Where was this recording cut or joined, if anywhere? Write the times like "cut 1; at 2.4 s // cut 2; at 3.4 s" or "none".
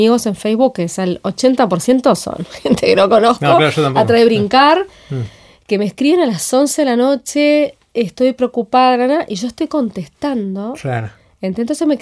none